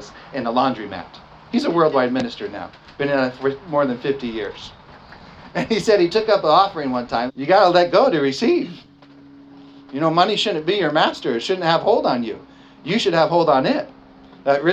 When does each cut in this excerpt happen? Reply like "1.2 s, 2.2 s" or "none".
7.3 s